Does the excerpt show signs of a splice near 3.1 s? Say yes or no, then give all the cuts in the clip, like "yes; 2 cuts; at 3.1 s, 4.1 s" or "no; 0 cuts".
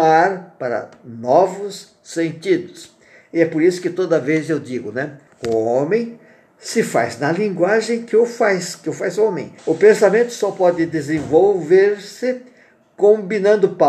no; 2 cuts; at 5.3 s, 9.6 s